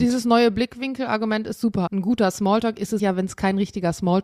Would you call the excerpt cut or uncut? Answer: cut